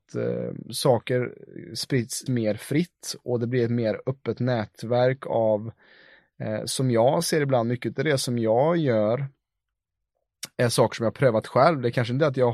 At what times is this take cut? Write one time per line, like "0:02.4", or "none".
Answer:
0:02.3